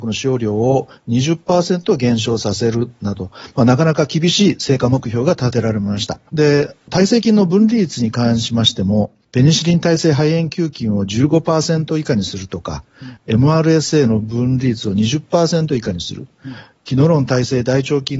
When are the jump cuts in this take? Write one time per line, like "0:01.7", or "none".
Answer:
0:06.3